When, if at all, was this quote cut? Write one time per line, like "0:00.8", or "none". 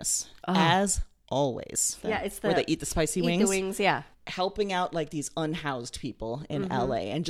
0:02.0
0:04.1

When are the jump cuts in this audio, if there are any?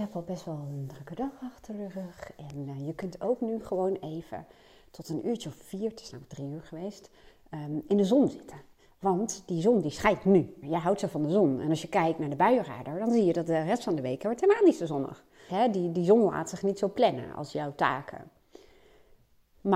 0:10.6
0:15.5

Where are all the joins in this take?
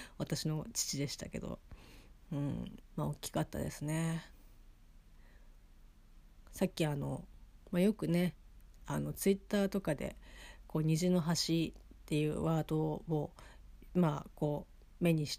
0:02.8

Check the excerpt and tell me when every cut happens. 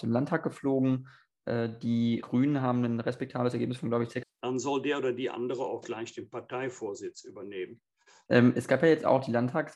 0:02.2
0:04.2
0:08.3

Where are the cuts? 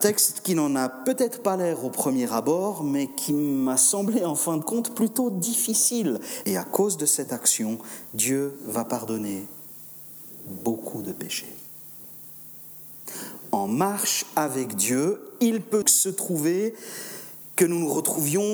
0:06.4
0:15.8

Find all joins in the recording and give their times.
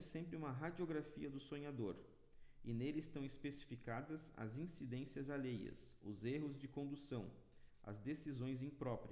none

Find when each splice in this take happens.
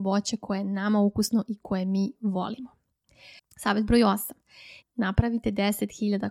0:03.4
0:04.8

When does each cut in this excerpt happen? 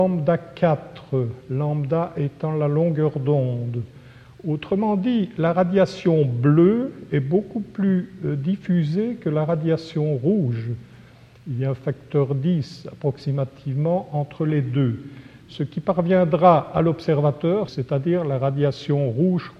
0:15.4
0:17.7

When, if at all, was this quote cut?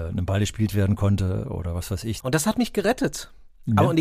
0:02.2

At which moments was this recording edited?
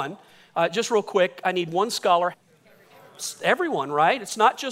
0:02.3

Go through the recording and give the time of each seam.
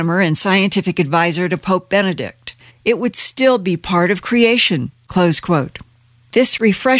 0:02.7

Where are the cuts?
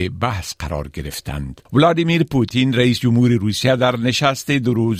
0:01.7

